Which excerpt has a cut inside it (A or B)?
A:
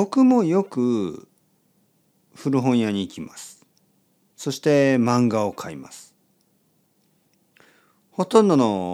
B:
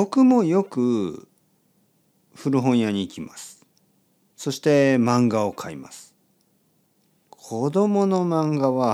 B